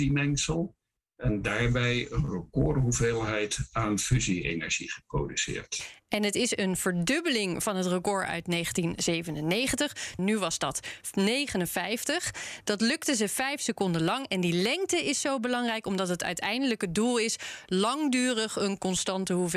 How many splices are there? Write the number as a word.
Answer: one